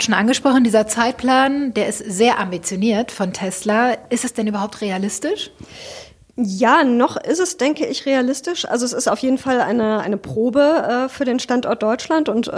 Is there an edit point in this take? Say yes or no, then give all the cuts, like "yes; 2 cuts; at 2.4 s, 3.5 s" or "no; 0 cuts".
no; 0 cuts